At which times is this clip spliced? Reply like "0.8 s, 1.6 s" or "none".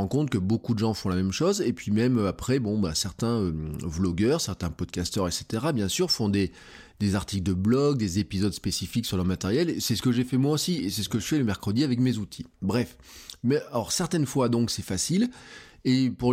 none

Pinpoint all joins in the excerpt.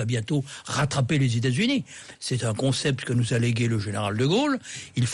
2.1 s

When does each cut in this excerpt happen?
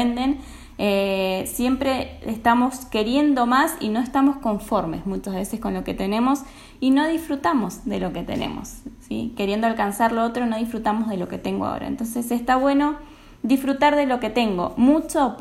none

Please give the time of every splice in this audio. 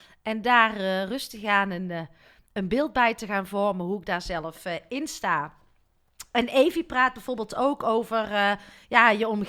none

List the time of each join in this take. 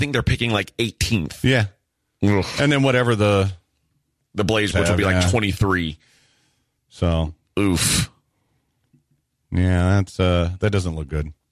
4.7 s

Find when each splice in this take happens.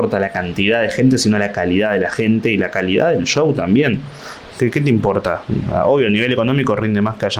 4.5 s

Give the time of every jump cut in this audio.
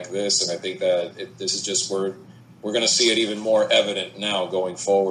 none

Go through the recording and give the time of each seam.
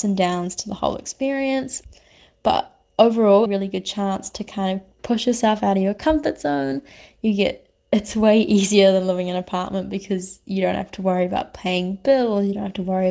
3.5 s

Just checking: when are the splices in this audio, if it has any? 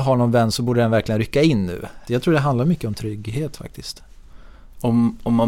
2.1 s

